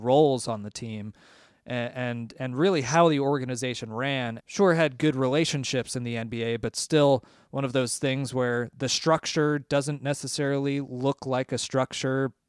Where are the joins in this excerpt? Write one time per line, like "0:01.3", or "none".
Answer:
0:04.4